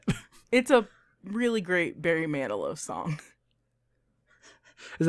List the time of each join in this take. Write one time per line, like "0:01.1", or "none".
none